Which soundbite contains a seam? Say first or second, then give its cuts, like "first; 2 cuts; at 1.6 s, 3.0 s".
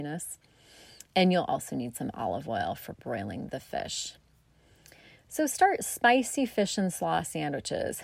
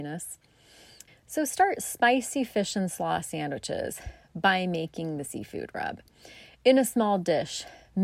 second; 1 cut; at 1.1 s